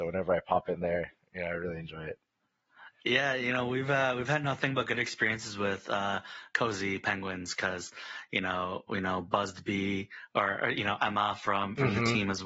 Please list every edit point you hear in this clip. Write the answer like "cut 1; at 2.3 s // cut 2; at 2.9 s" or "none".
none